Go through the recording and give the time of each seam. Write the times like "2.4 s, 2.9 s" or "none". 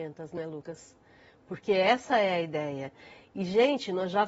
none